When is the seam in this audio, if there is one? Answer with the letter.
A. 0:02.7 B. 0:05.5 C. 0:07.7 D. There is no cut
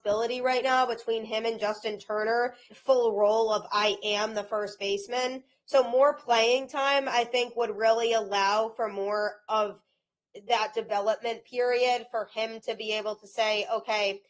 A